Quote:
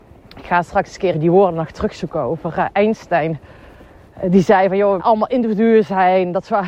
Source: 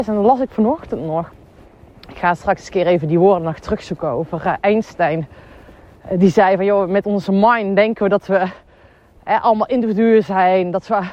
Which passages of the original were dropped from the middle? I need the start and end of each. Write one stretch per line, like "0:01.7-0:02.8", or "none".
0:02.8-0:03.0
0:06.9-0:09.4

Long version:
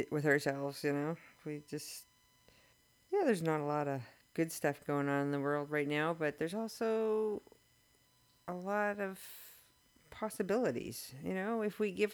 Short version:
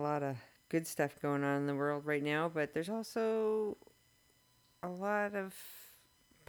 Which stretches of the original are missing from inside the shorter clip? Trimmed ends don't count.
none

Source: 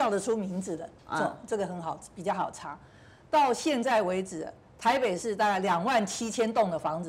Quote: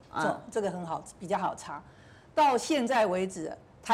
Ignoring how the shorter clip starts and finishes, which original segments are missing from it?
none

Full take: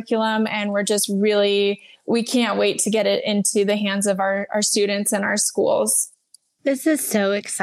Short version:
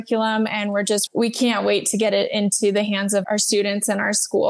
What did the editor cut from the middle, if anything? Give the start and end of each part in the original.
0:01.1-0:02.0
0:04.2-0:04.5

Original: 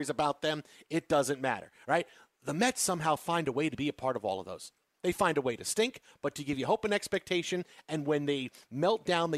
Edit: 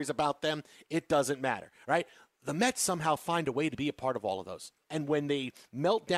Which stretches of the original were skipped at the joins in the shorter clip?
0:04.9-0:07.8

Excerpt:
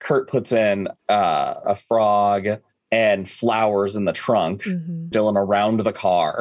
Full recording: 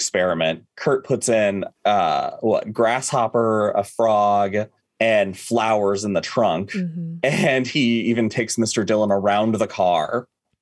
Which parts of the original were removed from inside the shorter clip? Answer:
0:02.4-0:03.7
0:07.2-0:08.9

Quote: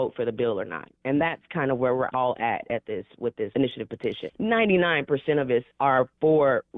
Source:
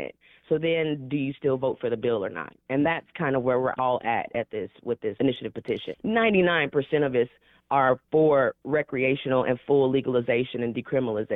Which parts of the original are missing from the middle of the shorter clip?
0:07.4-0:07.6

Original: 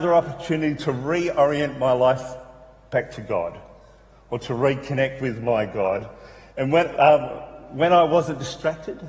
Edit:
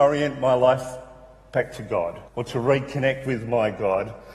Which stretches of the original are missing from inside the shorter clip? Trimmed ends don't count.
0:03.7-0:04.2

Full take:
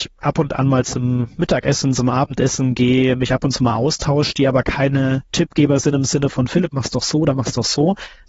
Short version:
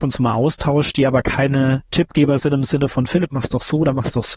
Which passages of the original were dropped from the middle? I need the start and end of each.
none

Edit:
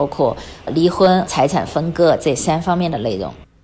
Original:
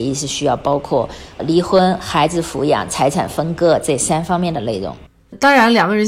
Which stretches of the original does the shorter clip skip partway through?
0:02.0-0:02.9

